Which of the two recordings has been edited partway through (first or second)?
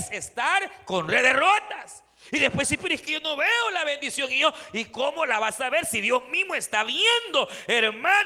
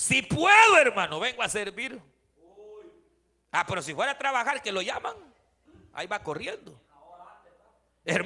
second